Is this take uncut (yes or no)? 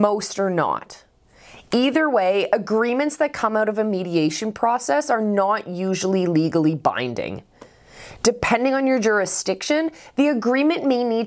yes